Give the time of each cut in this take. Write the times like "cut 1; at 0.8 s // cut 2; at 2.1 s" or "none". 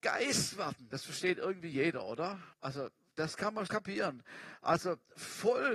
cut 1; at 2.5 s // cut 2; at 3.7 s

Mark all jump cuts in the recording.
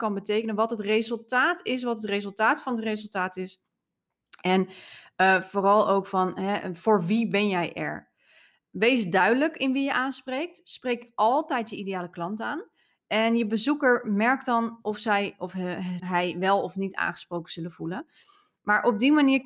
cut 1; at 16.0 s

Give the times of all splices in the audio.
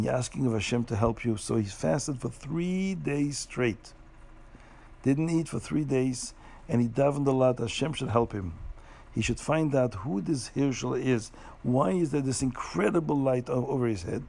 none

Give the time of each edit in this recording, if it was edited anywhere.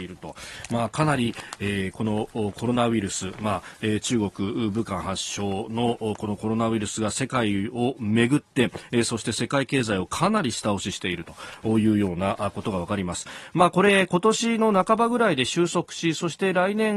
none

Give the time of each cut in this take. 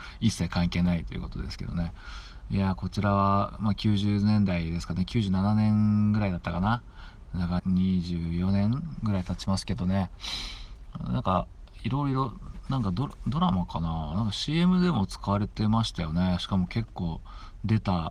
cut 1; at 7.6 s

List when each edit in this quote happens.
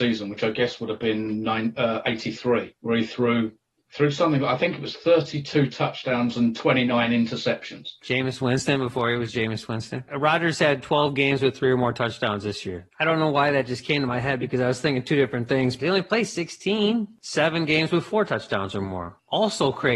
cut 1; at 12.9 s // cut 2; at 15.8 s

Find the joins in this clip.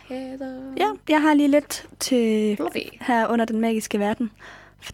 cut 1; at 2.6 s

